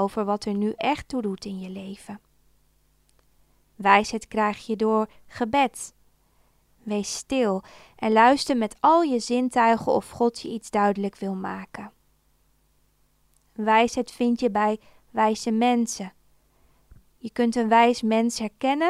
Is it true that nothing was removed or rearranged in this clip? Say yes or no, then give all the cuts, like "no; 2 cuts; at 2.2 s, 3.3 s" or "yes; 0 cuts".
yes; 0 cuts